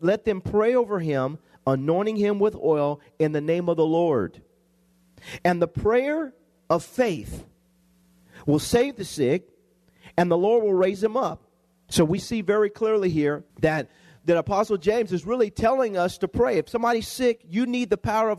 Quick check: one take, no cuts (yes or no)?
no